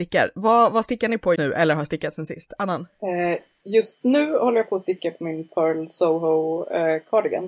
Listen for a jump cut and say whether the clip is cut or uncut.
cut